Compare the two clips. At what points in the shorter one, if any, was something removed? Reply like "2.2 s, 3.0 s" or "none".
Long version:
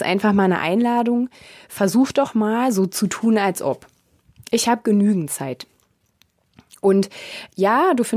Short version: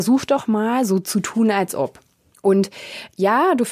2.3 s